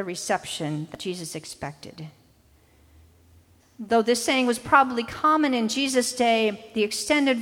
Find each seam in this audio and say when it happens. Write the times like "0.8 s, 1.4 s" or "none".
3.6 s